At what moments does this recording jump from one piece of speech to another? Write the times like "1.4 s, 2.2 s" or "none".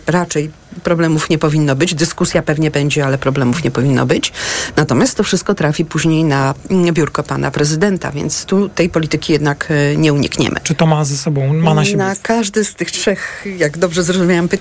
10.6 s